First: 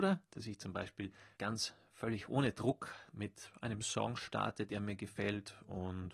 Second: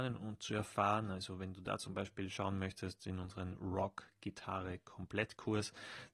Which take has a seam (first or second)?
first